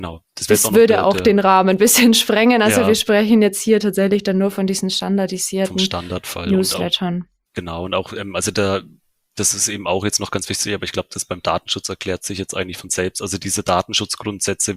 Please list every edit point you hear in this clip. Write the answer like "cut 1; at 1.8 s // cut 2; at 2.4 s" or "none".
none